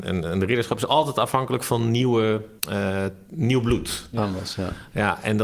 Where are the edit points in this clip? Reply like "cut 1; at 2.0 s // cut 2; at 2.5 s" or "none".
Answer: cut 1; at 2.6 s